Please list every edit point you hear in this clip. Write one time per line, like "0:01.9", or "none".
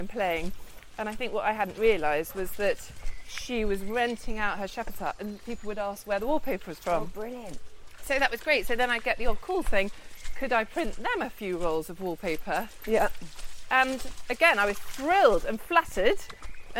none